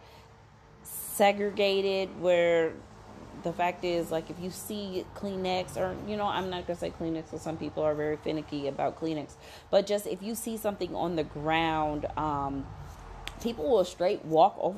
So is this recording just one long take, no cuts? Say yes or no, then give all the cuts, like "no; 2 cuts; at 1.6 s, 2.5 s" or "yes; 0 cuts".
yes; 0 cuts